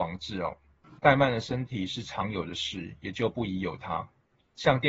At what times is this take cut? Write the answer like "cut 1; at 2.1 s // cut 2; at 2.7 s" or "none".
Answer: cut 1; at 1.0 s